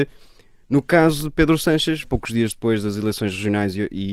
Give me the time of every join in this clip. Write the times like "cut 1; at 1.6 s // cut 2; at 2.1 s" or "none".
cut 1; at 2.0 s